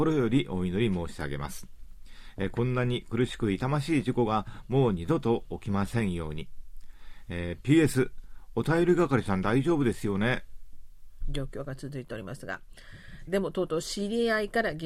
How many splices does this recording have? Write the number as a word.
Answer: two